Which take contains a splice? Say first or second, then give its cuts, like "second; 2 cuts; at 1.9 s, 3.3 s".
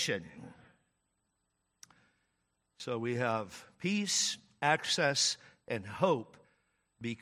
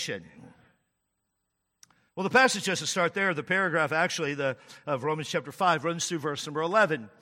second; 1 cut; at 2.1 s